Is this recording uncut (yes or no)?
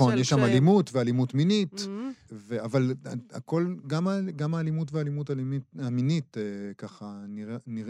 no